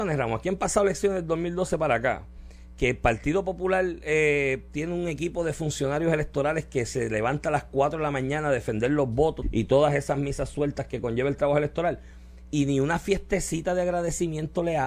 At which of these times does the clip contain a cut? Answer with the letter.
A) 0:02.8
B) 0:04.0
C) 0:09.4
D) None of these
C